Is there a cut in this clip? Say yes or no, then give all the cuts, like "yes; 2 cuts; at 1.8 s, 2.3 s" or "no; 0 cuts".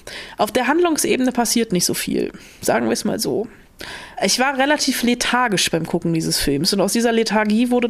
yes; 1 cut; at 4.1 s